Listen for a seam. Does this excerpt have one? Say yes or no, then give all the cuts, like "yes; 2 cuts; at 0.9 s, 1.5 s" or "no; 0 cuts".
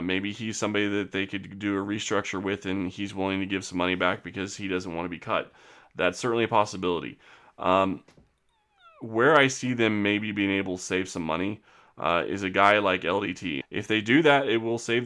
yes; 1 cut; at 13.6 s